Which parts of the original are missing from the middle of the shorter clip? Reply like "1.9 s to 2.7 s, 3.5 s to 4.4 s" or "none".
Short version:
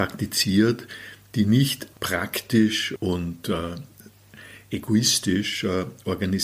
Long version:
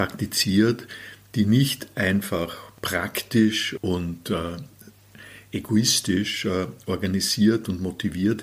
1.9 s to 2.7 s